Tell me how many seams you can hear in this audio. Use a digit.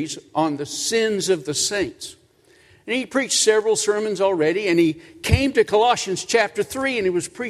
0